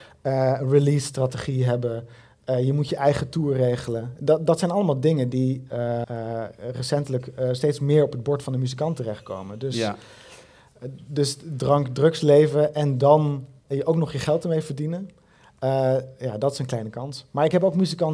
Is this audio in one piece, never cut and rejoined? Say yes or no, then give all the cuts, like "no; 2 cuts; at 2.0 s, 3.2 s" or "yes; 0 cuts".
no; 1 cut; at 6.0 s